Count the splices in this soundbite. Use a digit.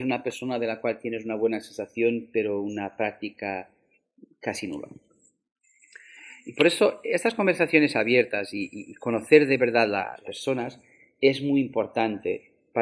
0